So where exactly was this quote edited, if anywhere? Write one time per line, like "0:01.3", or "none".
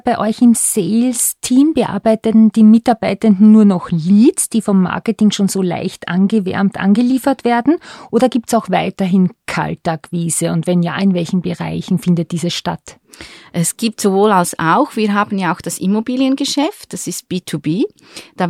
none